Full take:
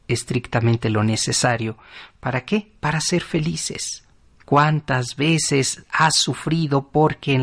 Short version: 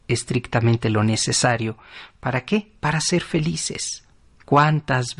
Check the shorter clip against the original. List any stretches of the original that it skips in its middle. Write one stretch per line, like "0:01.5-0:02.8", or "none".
none

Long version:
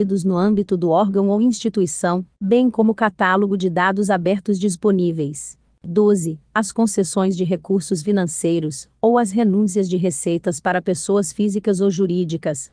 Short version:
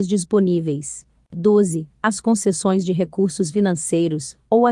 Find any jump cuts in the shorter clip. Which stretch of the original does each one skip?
none

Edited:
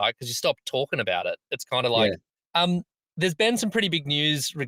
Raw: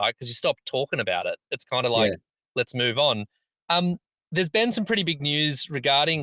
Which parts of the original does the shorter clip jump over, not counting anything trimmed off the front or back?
0:02.5-0:03.6

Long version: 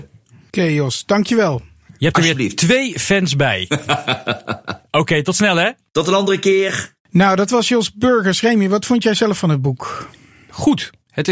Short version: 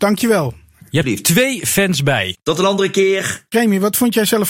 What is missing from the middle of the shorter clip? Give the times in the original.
0:02.1-0:02.4
0:03.7-0:05.8
0:07.0-0:08.4

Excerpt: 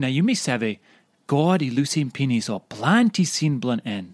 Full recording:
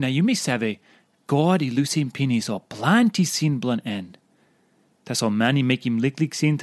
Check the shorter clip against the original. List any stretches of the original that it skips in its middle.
none

